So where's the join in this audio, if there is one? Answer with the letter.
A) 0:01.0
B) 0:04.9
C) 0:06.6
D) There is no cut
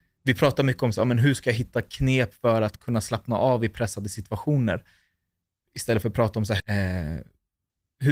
C